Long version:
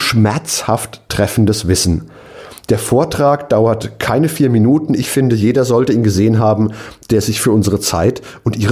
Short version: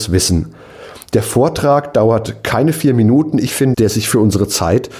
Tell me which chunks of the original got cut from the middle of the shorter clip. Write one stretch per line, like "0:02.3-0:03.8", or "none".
0:05.3-0:07.1